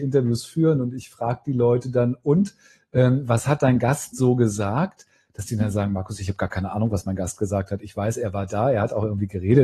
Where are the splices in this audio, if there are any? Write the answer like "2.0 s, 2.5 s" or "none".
none